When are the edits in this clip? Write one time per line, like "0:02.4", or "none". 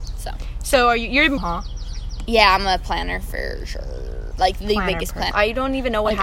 0:01.4
0:04.3
0:05.3

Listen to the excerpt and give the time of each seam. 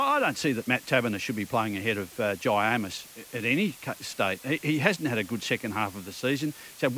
none

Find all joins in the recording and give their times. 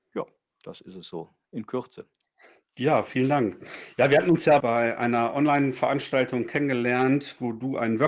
0:04.6

